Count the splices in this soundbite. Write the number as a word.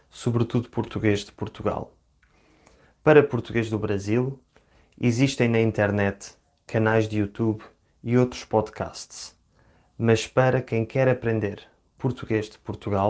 zero